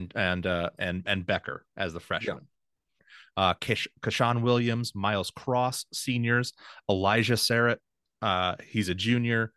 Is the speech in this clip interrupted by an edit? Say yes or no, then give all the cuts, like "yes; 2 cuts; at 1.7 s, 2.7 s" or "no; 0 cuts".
yes; 1 cut; at 3.0 s